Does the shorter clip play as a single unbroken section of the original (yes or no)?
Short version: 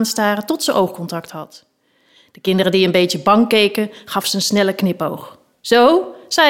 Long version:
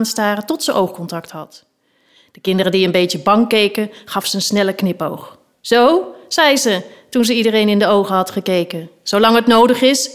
yes